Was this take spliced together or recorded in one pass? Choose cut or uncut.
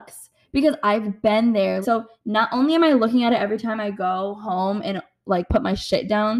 cut